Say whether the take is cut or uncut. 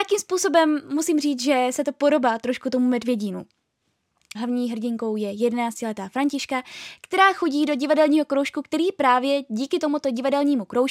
cut